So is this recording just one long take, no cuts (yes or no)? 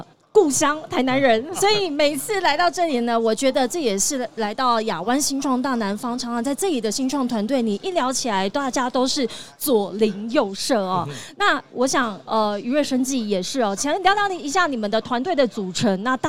yes